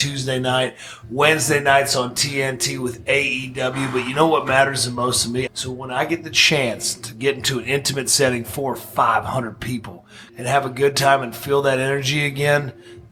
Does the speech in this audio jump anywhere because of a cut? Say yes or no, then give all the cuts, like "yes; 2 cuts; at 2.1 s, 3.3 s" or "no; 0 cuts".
yes; 2 cuts; at 5.5 s, 10.3 s